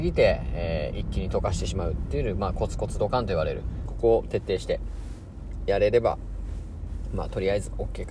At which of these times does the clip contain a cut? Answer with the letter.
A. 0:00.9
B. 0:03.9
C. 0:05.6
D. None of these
B